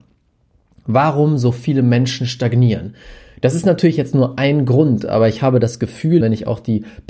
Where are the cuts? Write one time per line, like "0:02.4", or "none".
0:06.2